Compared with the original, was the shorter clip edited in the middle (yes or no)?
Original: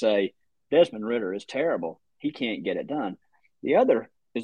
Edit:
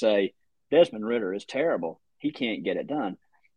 no